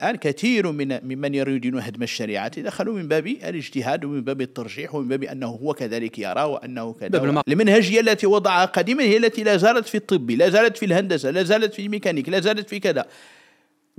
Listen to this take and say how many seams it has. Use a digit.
1